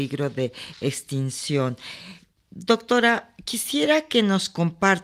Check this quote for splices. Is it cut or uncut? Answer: uncut